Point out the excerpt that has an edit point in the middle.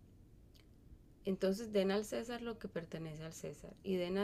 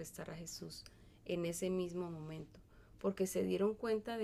first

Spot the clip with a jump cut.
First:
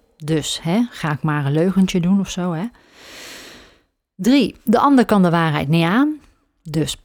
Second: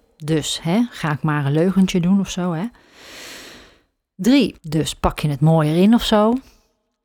second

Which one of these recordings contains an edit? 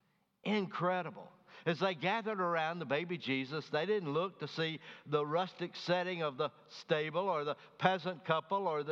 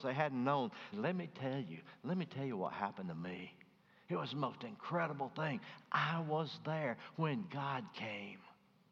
second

